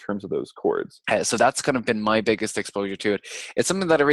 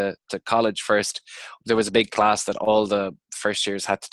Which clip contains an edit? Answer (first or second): first